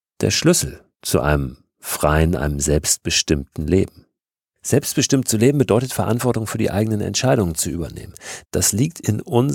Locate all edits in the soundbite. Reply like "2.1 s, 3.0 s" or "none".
0.9 s, 8.4 s